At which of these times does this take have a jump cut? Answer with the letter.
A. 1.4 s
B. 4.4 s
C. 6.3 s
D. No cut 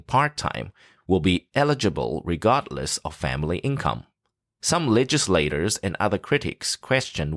B